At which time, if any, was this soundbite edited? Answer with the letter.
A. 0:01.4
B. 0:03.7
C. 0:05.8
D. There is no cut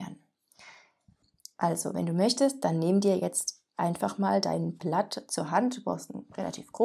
D